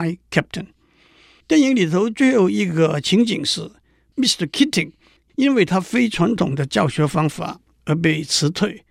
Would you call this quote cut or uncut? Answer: uncut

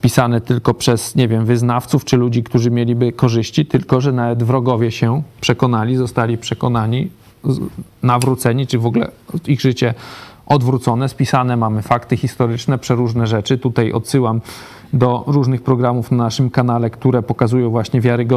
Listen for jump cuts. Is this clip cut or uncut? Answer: uncut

